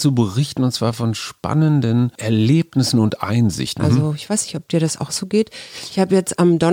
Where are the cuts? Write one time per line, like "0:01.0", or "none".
0:03.8